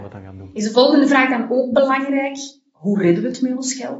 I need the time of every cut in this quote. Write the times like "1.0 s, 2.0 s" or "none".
none